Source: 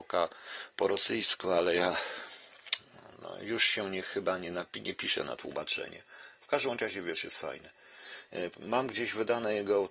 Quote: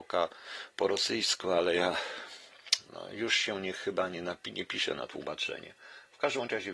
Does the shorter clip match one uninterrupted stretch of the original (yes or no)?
no